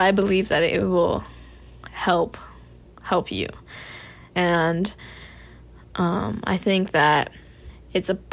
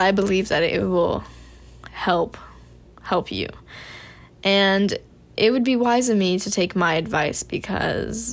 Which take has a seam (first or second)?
first